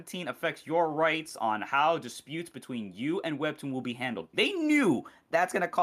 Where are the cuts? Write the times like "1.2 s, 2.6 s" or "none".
4.3 s